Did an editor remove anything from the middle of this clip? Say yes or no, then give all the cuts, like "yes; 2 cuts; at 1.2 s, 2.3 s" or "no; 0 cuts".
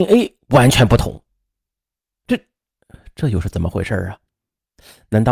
yes; 1 cut; at 2.1 s